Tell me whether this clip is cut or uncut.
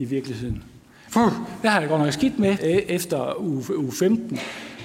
cut